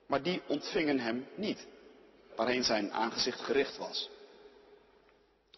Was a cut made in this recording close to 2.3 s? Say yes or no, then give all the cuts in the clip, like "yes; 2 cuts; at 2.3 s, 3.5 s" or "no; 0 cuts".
yes; 1 cut; at 2.3 s